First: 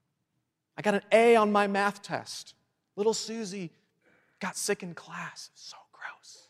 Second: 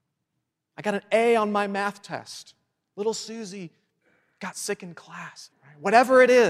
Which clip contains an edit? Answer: second; 1 cut; at 5.5 s

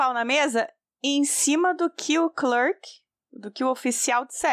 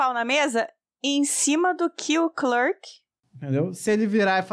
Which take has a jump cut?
second; 1 cut; at 3.2 s

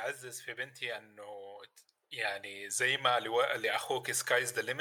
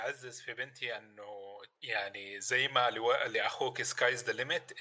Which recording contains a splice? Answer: second; 1 cut; at 1.7 s

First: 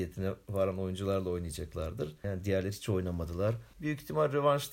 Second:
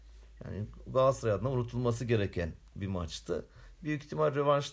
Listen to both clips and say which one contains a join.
first; 2 cuts; at 2.2 s, 3.7 s

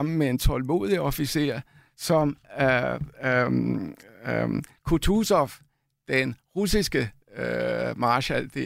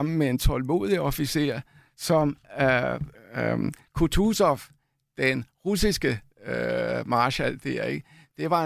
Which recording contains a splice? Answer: second; 1 cut; at 3.2 s

